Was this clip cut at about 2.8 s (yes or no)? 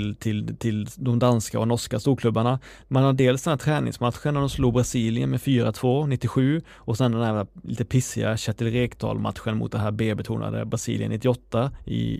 yes